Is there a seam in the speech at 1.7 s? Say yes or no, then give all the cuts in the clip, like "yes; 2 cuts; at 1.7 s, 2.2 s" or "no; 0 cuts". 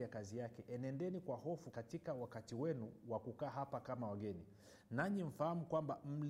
yes; 1 cut; at 1.7 s